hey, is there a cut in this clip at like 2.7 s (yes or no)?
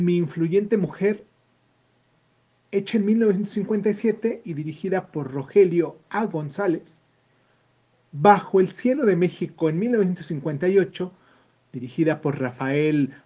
no